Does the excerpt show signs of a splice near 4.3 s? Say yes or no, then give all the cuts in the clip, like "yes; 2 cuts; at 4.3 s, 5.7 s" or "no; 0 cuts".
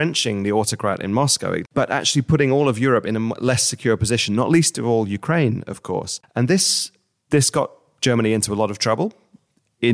no; 2 cuts; at 1.7 s, 6.2 s